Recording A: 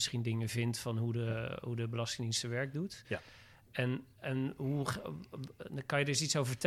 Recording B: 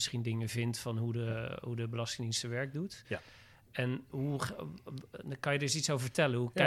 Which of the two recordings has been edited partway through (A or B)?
B